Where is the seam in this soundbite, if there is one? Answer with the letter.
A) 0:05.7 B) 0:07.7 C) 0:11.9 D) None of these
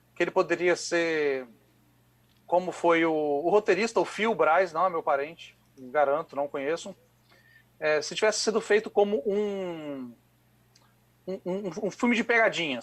D